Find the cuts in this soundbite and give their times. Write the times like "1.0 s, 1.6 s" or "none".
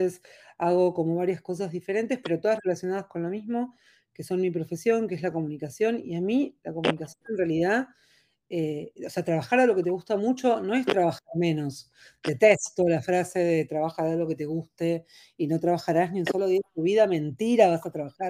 none